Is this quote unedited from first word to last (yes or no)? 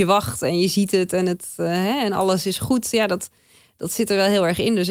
yes